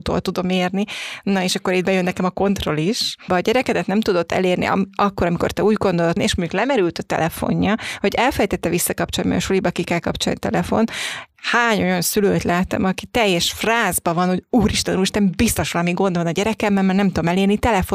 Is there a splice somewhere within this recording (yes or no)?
yes